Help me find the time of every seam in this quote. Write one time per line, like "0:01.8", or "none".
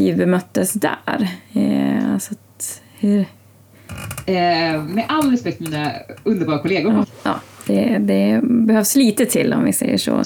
0:07.0